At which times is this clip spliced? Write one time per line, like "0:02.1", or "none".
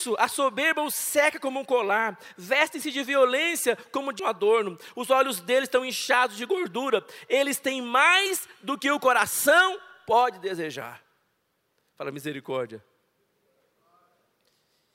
0:04.2